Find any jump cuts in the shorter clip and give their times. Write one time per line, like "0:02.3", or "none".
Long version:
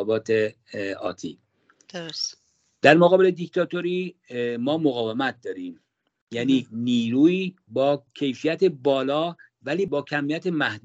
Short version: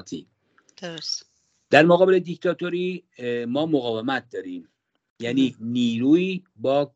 none